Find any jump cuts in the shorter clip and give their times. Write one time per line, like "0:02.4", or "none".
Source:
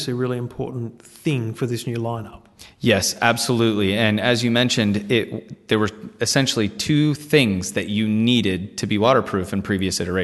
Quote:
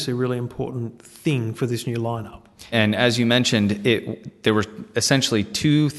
0:02.7